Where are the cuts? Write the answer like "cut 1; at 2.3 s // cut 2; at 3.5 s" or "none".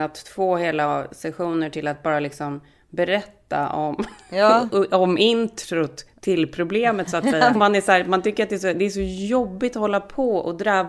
cut 1; at 7.5 s